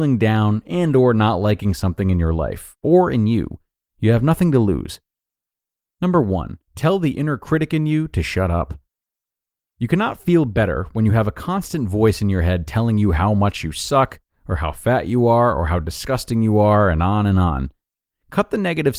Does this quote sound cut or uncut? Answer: cut